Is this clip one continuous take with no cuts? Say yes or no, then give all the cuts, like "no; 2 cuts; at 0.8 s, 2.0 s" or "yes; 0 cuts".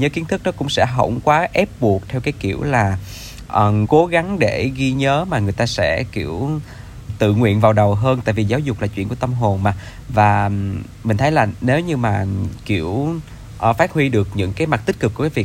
no; 2 cuts; at 3.8 s, 7.1 s